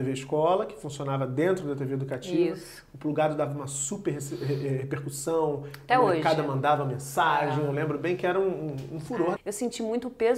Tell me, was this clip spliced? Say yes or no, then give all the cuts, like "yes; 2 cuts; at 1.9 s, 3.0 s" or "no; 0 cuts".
yes; 1 cut; at 9.4 s